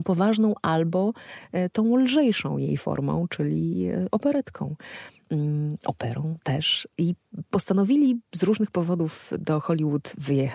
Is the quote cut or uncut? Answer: uncut